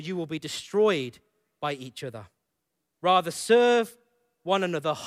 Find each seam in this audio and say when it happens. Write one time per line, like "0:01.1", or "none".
0:02.9